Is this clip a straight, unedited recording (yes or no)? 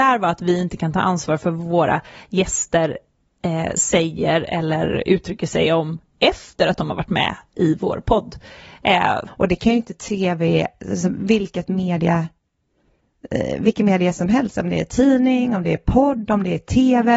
no